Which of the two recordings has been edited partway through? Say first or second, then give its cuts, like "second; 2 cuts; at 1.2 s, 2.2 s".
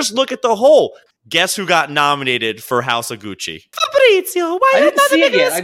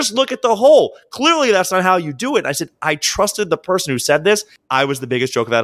first; 2 cuts; at 1.1 s, 3.7 s